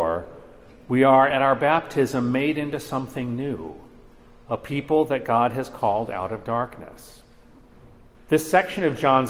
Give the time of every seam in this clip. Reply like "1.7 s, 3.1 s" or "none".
8.1 s